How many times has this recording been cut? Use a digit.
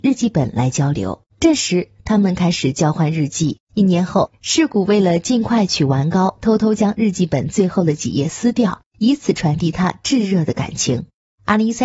2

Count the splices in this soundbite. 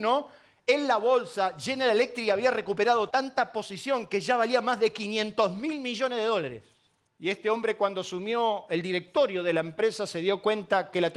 2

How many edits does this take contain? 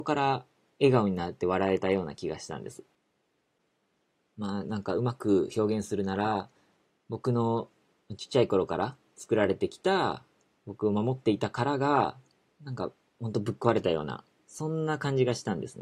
0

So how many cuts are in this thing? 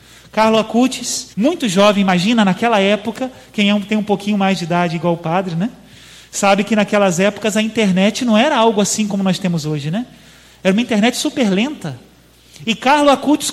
1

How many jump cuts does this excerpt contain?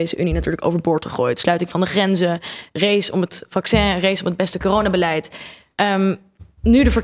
0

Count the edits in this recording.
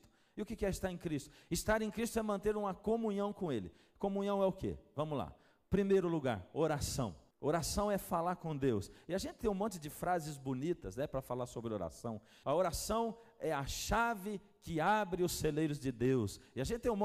2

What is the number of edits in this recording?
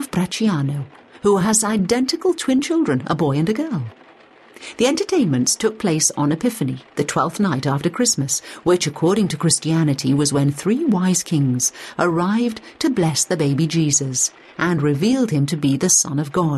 0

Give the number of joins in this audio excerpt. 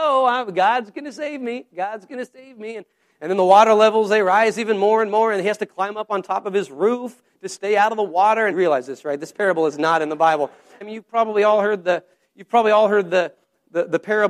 2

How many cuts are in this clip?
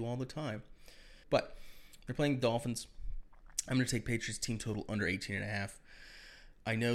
1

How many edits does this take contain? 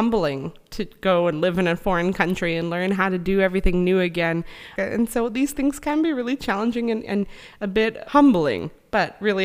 2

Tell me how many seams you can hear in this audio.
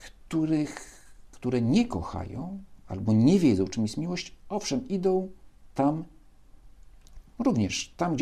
0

